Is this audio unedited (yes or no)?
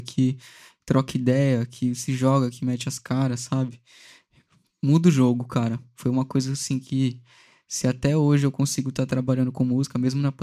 yes